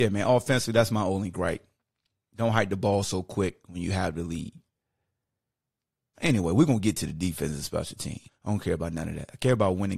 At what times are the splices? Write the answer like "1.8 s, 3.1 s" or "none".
6.1 s, 8.3 s

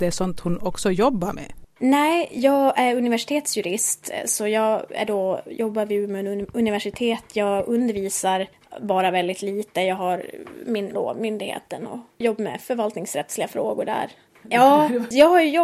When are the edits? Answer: 10.9 s, 14.4 s

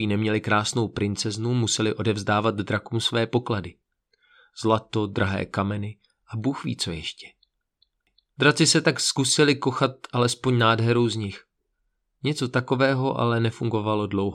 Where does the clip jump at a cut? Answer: none

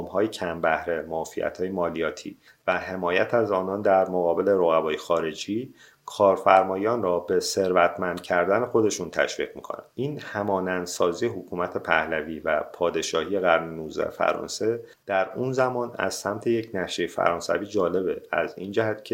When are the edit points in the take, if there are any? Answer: 9.9 s

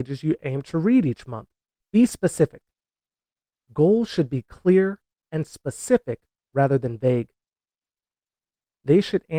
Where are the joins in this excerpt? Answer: 1.8 s

